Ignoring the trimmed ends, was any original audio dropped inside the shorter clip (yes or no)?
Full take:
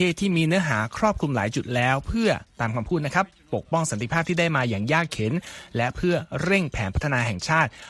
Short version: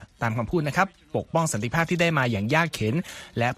no